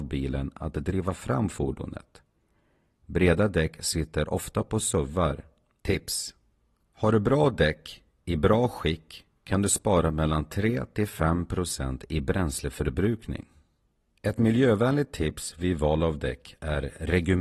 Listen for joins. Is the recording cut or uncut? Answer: cut